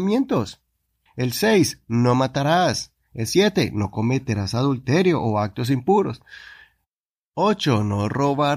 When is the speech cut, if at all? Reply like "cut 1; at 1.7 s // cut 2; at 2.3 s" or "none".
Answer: cut 1; at 1.1 s

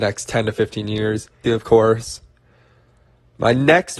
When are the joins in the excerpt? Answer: cut 1; at 1.4 s

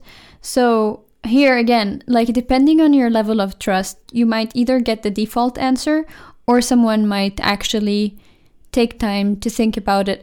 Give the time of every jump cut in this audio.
none

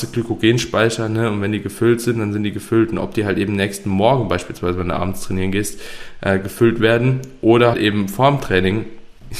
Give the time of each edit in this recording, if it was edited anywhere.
cut 1; at 7.7 s

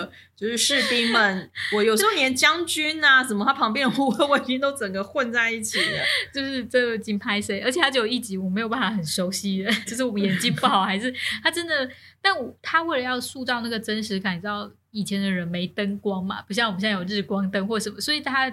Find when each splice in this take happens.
cut 1; at 9.9 s

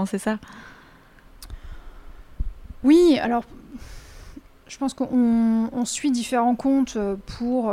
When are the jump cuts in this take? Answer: none

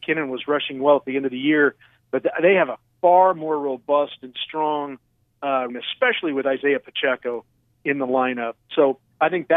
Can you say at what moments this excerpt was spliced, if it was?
cut 1; at 5.7 s

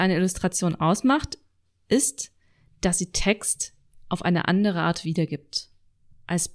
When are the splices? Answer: none

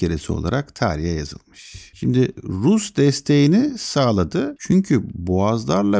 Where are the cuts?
cut 1; at 4.6 s

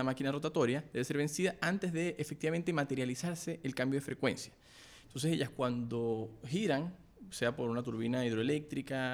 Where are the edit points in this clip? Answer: cut 1; at 5.0 s

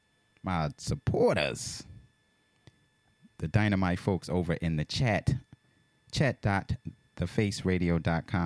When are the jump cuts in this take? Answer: none

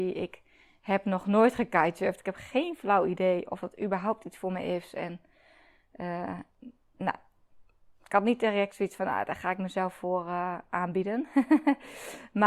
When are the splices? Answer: none

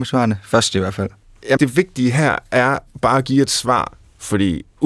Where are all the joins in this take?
cut 1; at 1.6 s

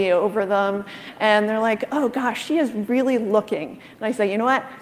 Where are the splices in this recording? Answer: none

